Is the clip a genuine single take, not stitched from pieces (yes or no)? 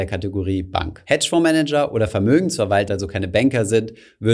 no